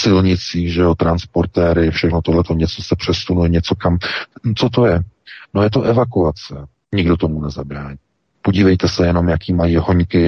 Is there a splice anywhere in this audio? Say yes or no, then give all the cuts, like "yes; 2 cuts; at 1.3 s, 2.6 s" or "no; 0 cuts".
yes; 2 cuts; at 6.7 s, 8.3 s